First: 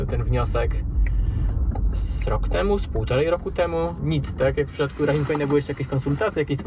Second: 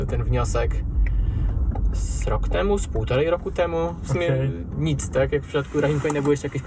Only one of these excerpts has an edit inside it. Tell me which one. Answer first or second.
first